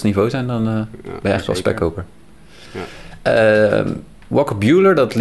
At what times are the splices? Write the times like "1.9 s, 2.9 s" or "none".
none